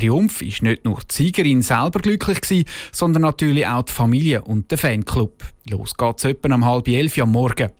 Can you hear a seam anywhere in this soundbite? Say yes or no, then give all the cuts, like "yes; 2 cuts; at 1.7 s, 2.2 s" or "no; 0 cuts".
yes; 1 cut; at 5.6 s